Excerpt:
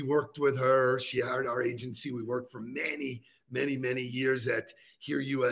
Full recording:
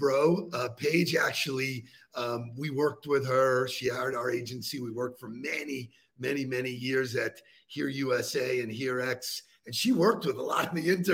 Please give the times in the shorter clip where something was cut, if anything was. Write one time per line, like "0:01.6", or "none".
none